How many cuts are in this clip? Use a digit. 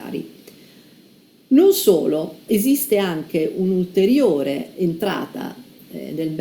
2